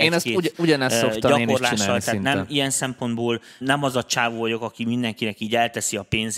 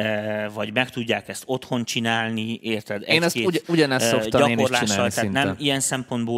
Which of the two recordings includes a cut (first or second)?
first